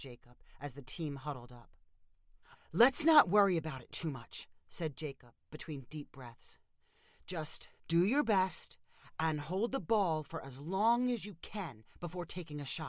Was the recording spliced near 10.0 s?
no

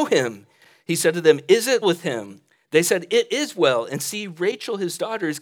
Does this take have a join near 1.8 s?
yes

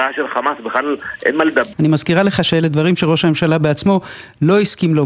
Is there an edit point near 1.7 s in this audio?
yes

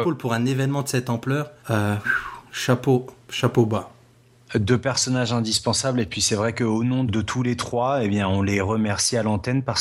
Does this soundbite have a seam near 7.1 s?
yes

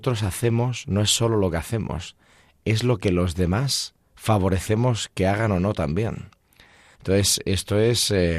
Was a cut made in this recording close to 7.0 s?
yes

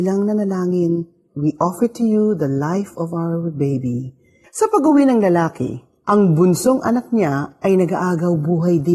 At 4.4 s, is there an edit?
yes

